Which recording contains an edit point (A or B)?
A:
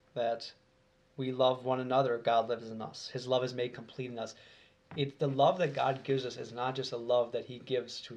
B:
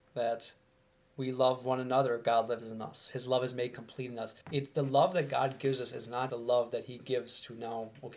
B